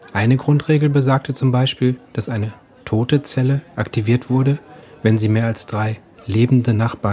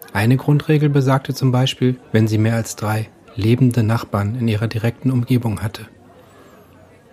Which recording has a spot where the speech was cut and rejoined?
second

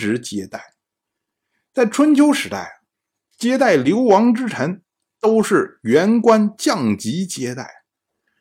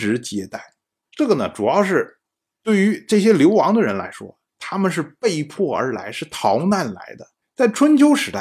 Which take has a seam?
second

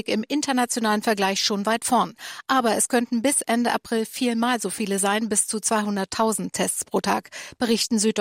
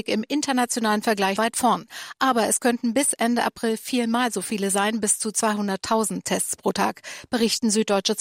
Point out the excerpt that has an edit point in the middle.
second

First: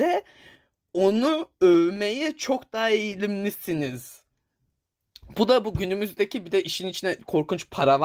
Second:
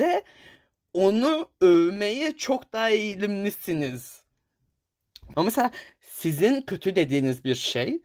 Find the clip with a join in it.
second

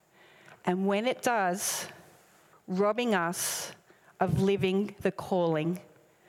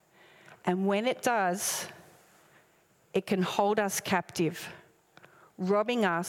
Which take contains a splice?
first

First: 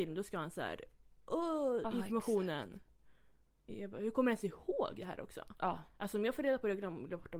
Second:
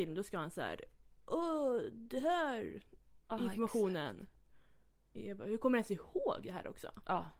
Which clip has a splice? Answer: first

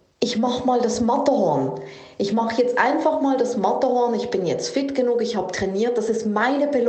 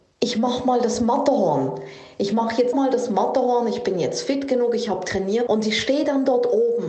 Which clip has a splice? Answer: second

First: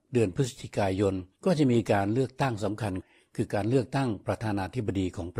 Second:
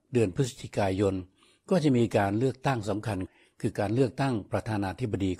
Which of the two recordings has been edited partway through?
first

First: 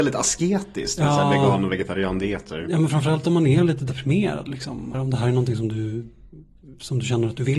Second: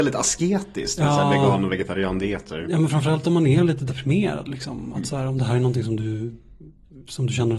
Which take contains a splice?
first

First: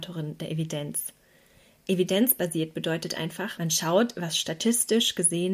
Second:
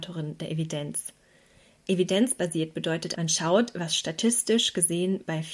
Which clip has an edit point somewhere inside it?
second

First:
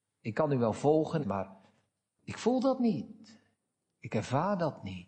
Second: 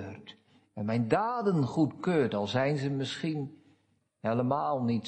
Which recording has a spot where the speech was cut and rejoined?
first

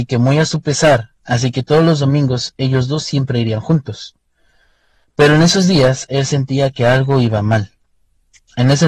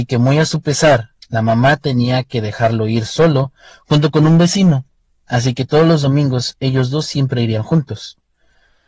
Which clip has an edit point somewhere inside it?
first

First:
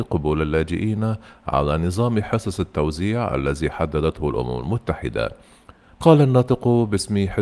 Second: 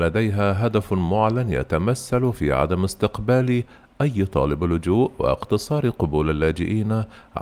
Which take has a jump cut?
first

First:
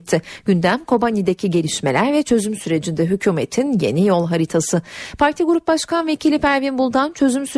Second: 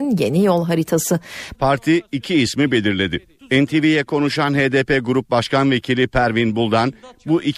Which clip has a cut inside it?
second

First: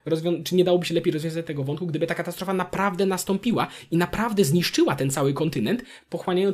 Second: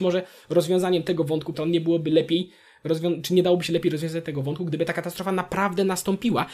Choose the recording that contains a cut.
second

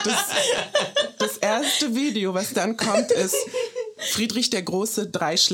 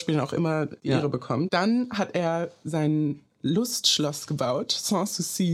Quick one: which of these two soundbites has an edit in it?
second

